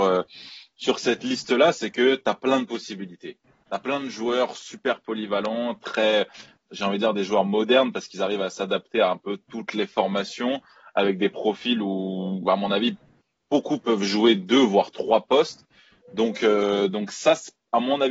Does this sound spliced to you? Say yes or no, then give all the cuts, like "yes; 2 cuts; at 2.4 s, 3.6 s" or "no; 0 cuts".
no; 0 cuts